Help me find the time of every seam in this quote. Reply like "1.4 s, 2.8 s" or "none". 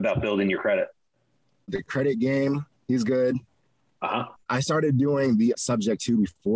4.4 s